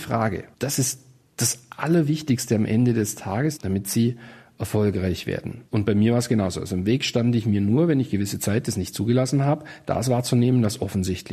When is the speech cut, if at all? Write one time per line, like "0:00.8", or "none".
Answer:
0:03.6
0:05.7